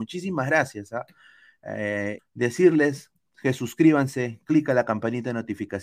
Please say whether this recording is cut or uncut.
cut